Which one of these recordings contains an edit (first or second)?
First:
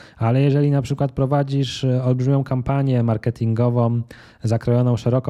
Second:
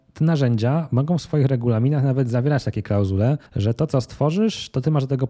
second